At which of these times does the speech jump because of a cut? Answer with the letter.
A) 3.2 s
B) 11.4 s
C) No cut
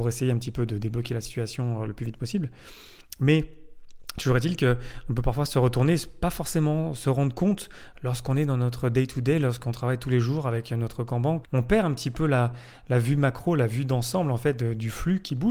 B